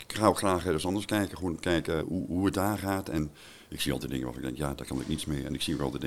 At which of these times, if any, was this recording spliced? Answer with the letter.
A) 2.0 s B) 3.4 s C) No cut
A